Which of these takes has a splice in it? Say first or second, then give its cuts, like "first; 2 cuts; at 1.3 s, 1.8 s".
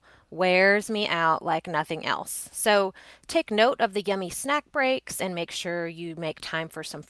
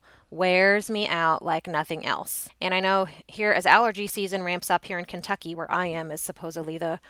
second; 2 cuts; at 2.5 s, 5.5 s